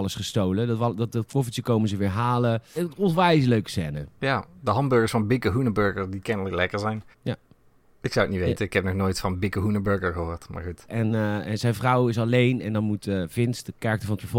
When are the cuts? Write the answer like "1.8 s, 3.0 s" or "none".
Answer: 2.8 s, 7.1 s, 10.9 s